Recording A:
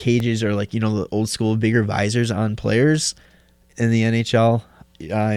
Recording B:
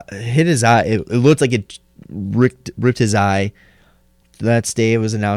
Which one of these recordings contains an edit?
B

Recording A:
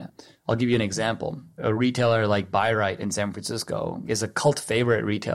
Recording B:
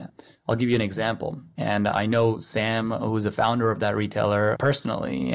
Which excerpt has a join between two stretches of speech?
B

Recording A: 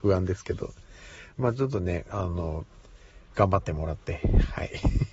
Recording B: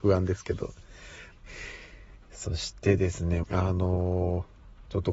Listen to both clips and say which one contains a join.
B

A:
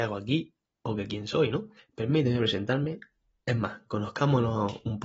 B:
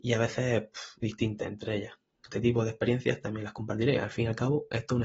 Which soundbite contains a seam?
B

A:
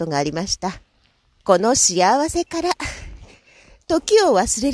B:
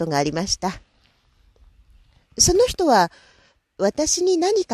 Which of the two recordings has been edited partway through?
A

